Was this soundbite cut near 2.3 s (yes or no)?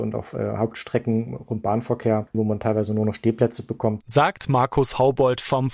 yes